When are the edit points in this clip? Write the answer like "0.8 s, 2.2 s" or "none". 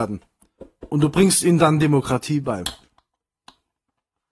none